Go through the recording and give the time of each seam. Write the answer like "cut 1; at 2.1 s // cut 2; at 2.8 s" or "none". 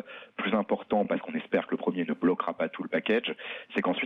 none